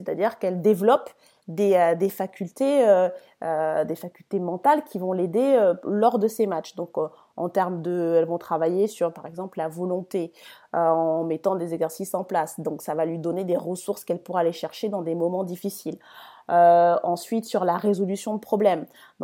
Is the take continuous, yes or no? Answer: yes